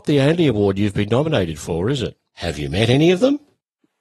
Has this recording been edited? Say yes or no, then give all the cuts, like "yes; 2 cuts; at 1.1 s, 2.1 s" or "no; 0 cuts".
yes; 1 cut; at 2.3 s